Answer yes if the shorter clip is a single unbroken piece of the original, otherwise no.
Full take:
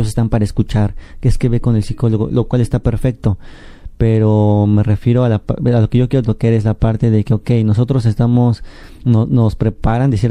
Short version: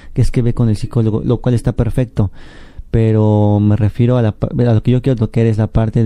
yes